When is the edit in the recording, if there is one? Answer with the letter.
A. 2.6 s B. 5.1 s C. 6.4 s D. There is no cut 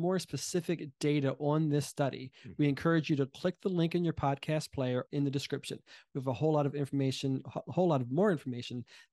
B